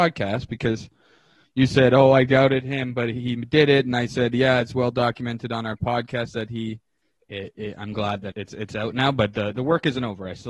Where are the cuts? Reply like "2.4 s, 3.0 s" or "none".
7.2 s, 8.3 s